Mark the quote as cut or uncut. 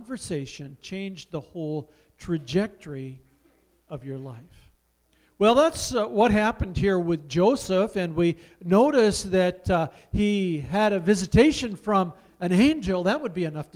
uncut